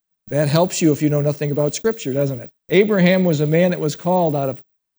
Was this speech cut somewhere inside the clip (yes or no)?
yes